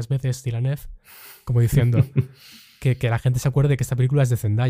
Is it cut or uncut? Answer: uncut